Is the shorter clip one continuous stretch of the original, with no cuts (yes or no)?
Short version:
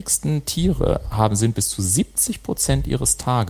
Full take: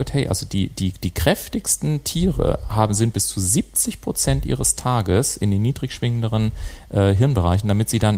yes